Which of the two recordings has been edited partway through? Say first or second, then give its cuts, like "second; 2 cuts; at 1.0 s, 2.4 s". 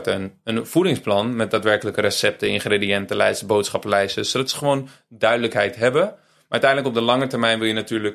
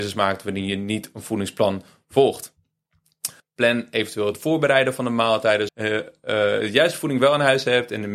second; 2 cuts; at 3.4 s, 5.7 s